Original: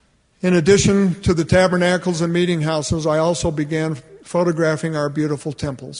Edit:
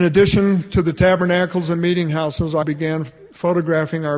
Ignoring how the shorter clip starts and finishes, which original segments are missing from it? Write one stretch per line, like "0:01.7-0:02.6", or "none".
0:03.1-0:03.5

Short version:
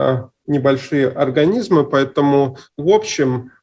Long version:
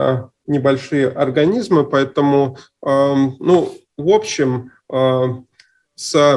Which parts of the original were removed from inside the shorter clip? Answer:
0:02.7-0:03.9

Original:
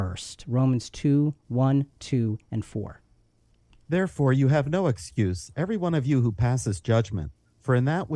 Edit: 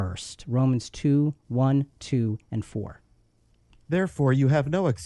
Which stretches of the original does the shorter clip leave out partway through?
none

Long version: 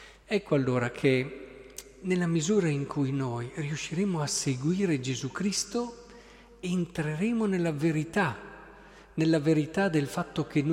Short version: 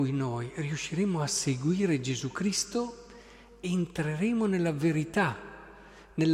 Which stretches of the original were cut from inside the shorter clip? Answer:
none

